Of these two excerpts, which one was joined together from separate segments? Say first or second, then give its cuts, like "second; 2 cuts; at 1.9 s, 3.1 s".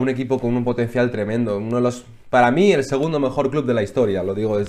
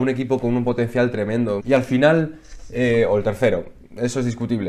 second; 1 cut; at 1.6 s